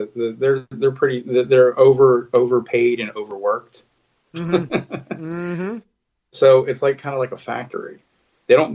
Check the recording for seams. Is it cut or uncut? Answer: uncut